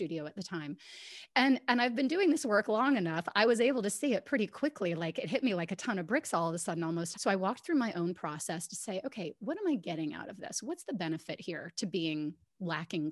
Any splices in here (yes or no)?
yes